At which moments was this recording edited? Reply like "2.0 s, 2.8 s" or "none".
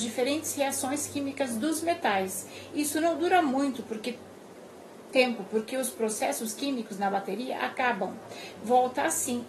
8.6 s